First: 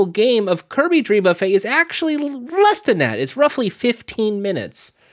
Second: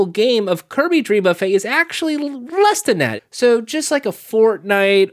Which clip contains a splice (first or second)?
second